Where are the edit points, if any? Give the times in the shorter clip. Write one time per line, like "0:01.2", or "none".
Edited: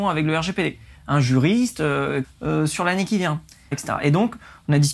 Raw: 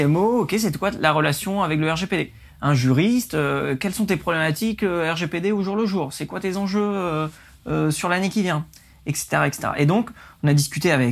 0:02.2
0:03.7